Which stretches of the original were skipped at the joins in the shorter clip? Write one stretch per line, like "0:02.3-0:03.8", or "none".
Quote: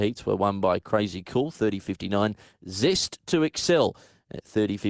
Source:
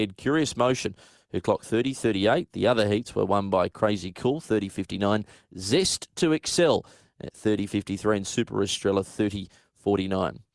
none